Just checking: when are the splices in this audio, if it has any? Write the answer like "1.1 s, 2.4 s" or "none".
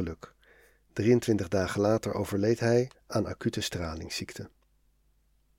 2.9 s